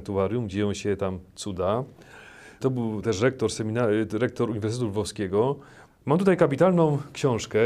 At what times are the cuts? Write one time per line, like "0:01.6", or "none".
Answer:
0:02.6
0:05.9